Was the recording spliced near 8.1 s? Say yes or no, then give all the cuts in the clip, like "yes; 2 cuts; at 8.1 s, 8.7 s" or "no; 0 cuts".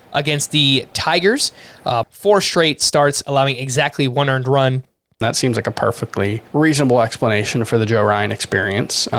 no; 3 cuts; at 2.0 s, 5.2 s, 6.5 s